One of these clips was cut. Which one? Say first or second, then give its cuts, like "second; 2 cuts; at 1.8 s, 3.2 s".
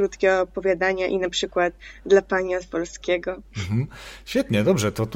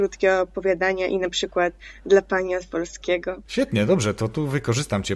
second; 1 cut; at 3.5 s